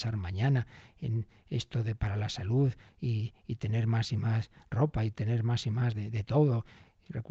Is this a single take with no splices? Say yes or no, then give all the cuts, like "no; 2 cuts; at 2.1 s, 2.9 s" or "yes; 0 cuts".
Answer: yes; 0 cuts